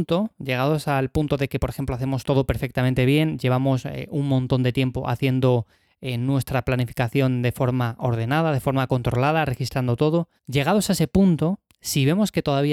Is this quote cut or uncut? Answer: cut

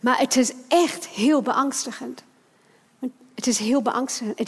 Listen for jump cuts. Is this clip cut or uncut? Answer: uncut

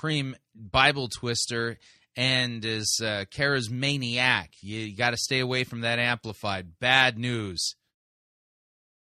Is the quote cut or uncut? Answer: uncut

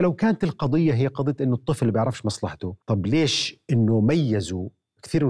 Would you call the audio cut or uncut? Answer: cut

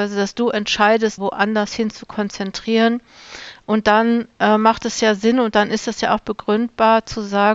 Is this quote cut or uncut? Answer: cut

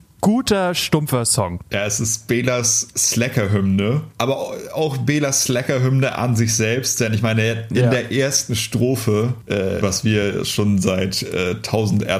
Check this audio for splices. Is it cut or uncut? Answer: cut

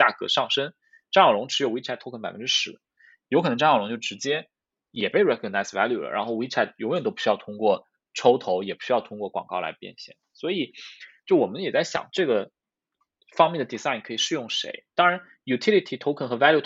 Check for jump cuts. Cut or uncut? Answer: uncut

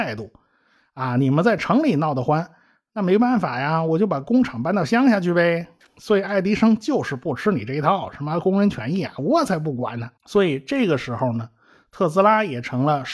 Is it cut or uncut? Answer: cut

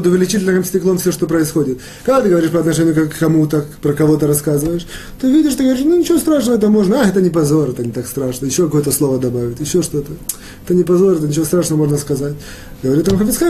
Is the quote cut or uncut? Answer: uncut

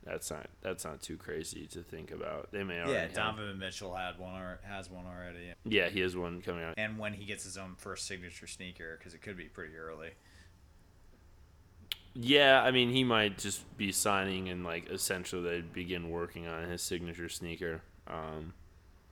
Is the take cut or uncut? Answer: cut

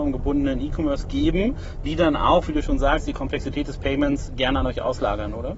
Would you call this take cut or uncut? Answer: uncut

